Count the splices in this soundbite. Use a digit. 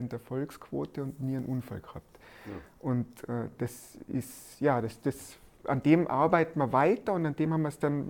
0